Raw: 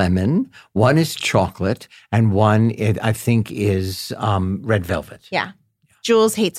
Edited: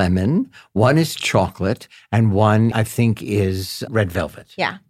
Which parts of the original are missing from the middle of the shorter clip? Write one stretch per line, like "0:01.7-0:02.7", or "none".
0:02.7-0:03.0
0:04.2-0:04.6